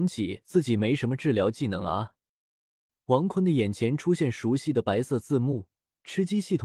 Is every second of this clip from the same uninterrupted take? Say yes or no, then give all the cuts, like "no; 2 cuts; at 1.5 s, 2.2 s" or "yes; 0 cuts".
yes; 0 cuts